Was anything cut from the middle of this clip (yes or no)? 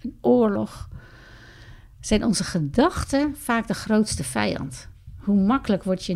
no